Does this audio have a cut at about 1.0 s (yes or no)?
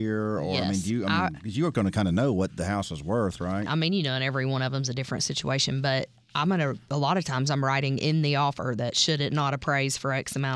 no